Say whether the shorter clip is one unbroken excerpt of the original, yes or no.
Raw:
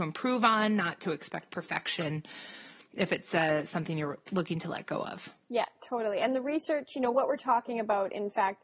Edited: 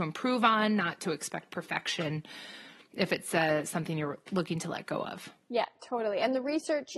yes